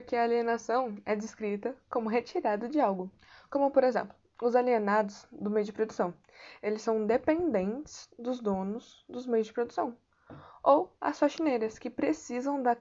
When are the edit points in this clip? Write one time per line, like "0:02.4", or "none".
none